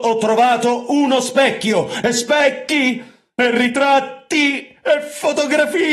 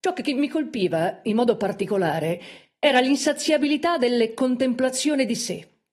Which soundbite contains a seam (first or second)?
first